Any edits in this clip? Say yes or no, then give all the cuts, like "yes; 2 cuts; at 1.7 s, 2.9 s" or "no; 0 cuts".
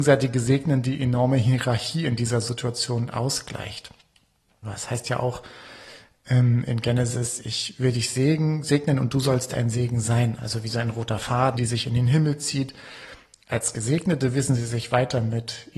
yes; 3 cuts; at 4.6 s, 10.4 s, 11.5 s